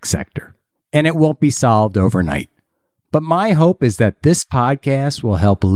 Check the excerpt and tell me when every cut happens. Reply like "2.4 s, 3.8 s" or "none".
none